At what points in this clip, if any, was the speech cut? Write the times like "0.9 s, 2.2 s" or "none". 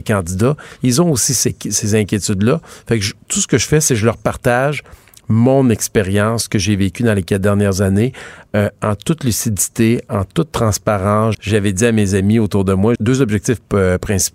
11.3 s, 13.0 s